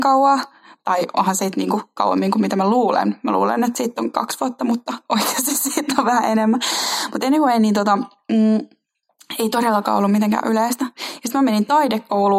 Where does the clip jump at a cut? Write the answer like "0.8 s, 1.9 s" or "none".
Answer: none